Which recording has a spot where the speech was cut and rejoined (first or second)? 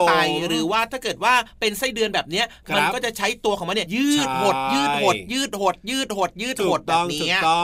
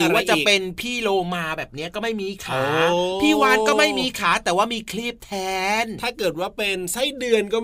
first